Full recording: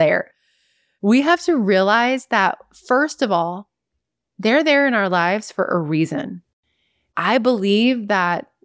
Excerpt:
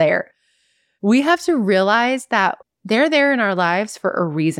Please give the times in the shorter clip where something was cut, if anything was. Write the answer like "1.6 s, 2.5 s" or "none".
2.6 s